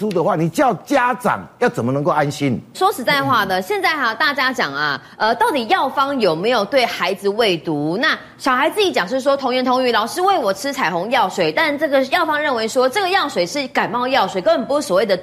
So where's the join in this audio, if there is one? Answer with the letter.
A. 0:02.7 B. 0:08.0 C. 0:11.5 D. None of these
A